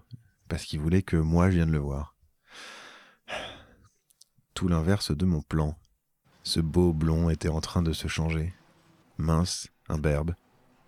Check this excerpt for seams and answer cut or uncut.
cut